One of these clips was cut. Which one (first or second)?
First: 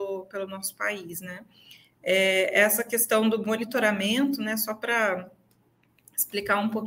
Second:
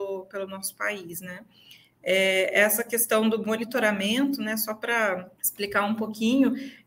second